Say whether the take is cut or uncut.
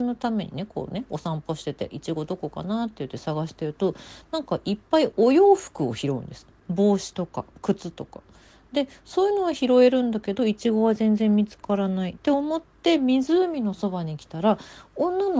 uncut